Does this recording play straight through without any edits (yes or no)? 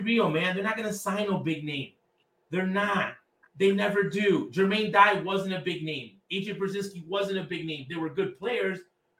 yes